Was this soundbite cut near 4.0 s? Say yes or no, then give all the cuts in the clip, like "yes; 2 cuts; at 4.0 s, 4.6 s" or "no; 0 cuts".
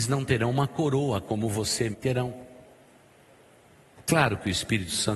yes; 2 cuts; at 1.9 s, 4.0 s